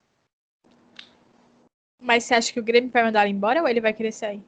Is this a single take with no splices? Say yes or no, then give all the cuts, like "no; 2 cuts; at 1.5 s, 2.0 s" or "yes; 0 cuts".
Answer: yes; 0 cuts